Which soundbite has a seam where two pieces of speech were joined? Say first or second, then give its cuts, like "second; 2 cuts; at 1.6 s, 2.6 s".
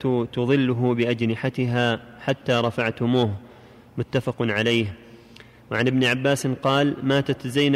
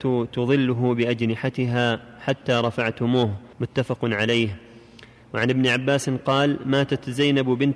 second; 1 cut; at 3.5 s